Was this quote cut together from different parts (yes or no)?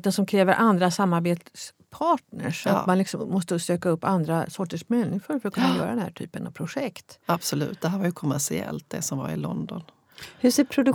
no